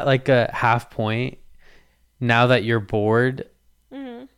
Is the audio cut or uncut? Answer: uncut